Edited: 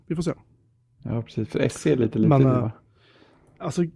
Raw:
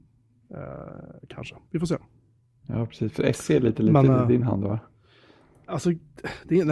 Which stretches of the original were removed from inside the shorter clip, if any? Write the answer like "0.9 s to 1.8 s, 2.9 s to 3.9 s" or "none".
4.2 s to 4.7 s